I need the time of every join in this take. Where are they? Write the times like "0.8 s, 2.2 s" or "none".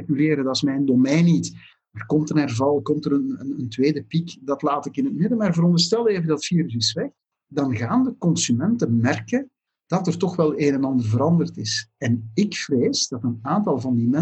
none